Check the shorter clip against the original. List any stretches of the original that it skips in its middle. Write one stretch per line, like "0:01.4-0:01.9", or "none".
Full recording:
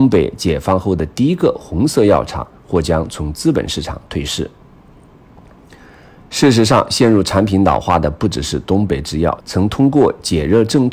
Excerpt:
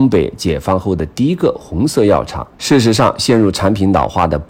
0:02.5-0:06.3